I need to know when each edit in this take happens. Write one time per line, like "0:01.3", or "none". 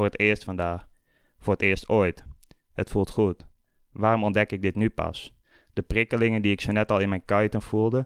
none

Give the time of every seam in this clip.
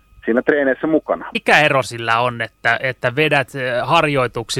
0:01.3

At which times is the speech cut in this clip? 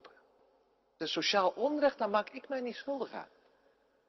0:01.0

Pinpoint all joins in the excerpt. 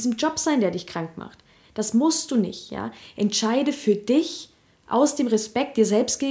none

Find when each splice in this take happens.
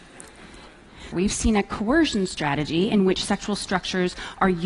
0:01.1

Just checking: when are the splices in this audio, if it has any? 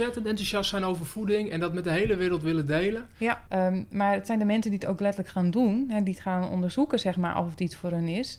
0:03.5

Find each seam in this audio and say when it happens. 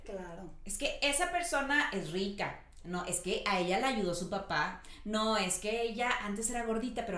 none

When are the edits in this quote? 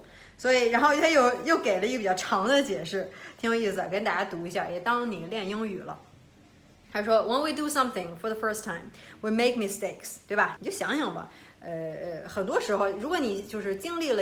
0:10.6

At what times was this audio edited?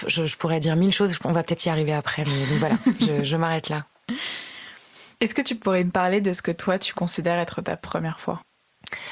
none

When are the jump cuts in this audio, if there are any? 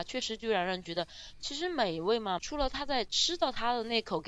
0:02.4

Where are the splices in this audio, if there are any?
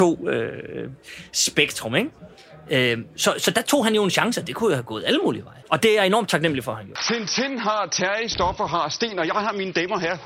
none

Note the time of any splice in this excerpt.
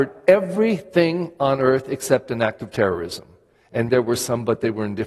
0:03.9

